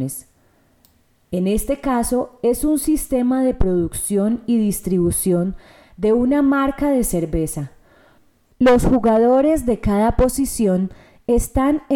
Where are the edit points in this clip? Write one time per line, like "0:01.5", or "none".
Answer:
0:01.2